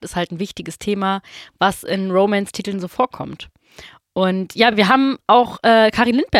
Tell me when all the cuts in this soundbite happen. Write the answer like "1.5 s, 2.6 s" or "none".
none